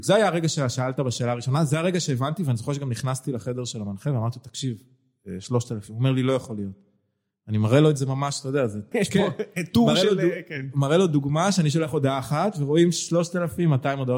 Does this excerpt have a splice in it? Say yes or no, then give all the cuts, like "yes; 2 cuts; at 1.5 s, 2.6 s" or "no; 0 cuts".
yes; 1 cut; at 8.9 s